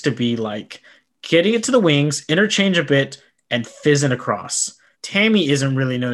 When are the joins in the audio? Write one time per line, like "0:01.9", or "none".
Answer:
0:04.9